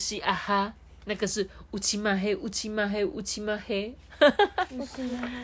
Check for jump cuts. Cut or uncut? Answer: cut